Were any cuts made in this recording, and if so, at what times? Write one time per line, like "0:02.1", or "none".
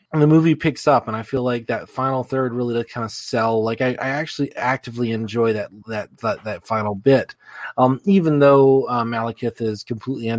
none